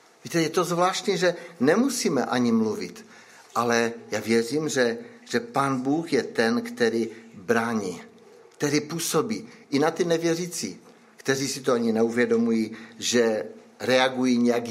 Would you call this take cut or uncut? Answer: uncut